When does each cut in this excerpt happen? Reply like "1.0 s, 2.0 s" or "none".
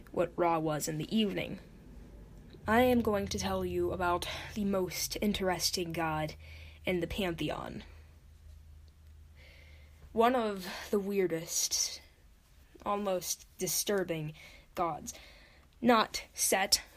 2.6 s